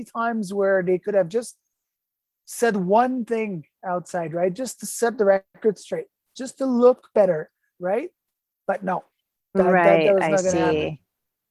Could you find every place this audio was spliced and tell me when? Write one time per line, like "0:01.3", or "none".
0:07.8